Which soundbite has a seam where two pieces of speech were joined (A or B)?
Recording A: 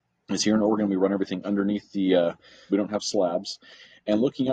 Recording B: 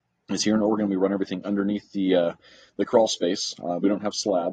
A